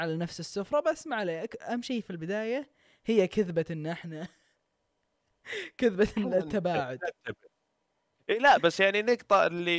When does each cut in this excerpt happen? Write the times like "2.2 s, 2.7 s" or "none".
none

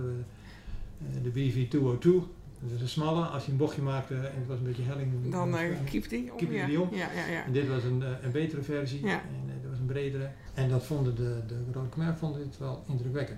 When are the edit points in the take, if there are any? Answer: none

